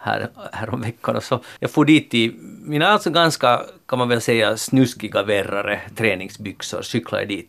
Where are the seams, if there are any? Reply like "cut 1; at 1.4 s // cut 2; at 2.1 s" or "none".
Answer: cut 1; at 1.6 s